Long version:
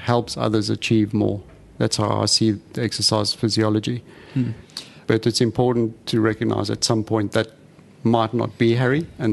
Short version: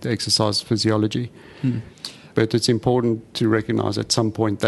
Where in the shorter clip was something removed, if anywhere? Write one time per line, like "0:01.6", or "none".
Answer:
none